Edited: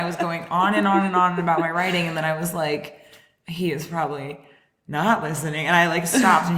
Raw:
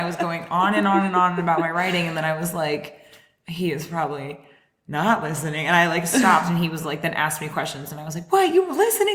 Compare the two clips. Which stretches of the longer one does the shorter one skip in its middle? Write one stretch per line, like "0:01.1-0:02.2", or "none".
none